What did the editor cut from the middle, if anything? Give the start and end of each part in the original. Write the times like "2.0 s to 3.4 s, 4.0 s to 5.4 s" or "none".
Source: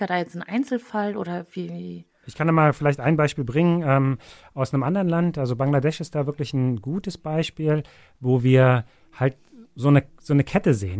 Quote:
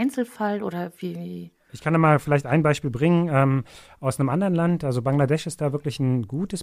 none